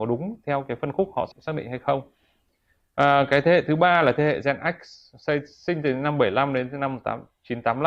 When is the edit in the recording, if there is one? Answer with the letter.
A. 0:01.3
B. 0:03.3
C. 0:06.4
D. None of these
A